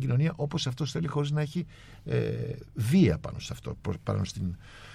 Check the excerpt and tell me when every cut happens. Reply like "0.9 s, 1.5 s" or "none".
none